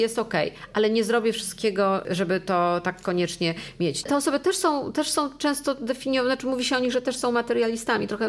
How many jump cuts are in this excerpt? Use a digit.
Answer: 1